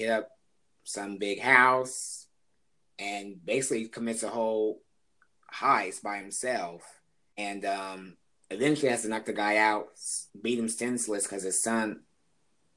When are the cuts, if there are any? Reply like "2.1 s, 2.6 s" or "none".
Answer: 7.3 s, 10.3 s